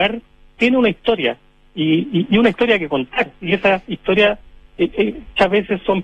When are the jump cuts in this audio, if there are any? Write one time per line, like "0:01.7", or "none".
none